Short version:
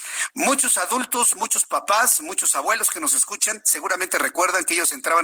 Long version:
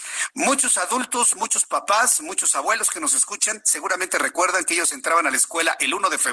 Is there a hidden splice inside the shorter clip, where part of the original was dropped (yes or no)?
no